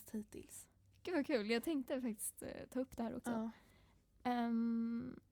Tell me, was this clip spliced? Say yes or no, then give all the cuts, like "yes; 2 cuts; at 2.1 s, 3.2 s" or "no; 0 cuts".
no; 0 cuts